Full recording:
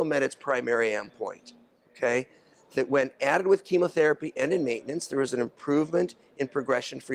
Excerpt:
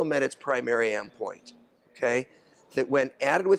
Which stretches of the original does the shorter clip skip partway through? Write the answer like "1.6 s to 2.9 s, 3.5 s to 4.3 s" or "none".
none